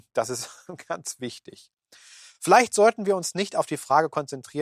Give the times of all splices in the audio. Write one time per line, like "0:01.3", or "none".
none